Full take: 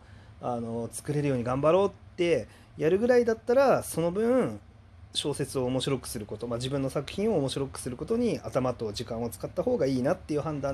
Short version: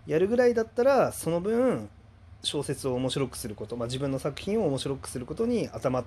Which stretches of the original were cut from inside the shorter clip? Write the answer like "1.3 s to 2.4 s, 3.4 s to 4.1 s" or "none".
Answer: none

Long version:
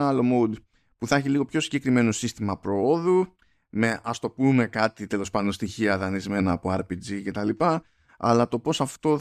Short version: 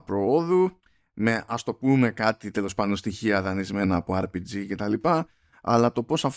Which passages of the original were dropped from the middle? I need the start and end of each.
none

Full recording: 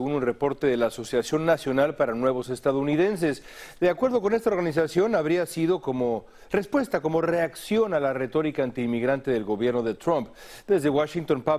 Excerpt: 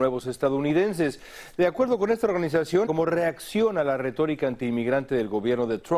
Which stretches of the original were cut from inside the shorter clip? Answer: 5.1 s to 7.0 s

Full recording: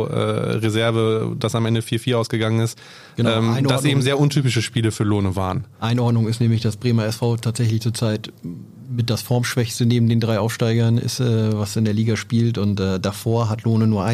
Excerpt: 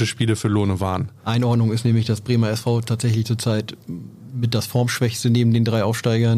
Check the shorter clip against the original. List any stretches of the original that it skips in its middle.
none

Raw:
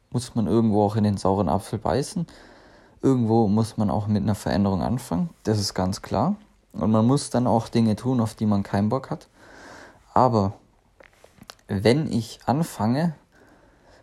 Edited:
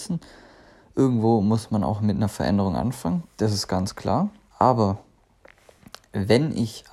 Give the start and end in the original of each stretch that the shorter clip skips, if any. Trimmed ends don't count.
6.6 s to 10.1 s

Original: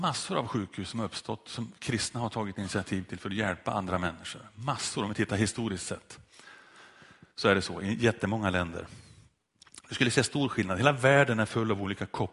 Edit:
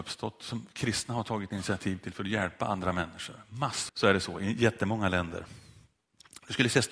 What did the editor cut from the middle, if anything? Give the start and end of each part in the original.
4.9 s to 7.3 s

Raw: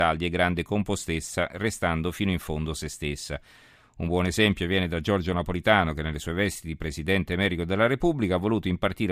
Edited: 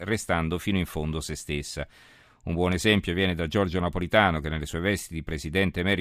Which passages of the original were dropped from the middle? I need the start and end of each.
none

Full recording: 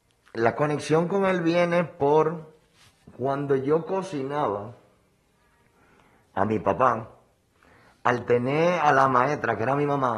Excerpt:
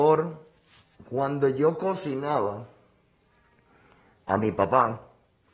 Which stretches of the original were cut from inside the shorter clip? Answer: none

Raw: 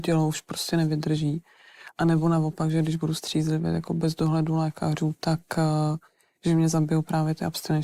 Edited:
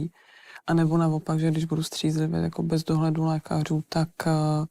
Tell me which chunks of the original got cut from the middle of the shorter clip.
none

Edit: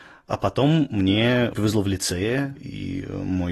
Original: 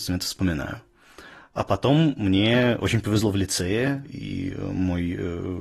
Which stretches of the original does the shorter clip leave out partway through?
2.8 s to 3.0 s

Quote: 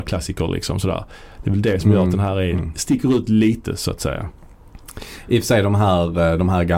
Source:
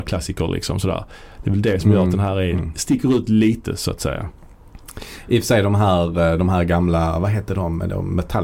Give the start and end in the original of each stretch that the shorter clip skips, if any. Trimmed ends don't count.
none

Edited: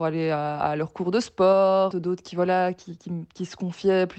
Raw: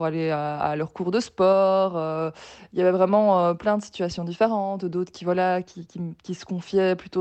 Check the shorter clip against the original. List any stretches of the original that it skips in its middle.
1.9 s to 4.8 s

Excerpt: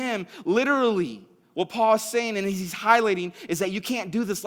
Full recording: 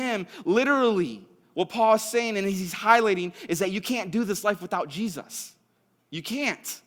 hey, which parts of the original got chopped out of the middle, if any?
none

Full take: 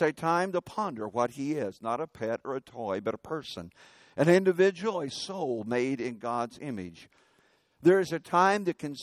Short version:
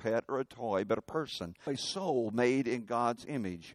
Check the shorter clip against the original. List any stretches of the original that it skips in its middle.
3.8 s to 5.0 s

